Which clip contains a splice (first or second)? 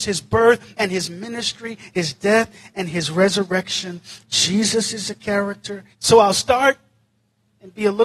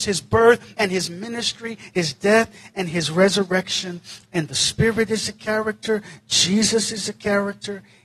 first